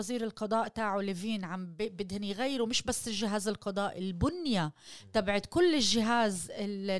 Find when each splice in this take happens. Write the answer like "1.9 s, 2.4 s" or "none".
none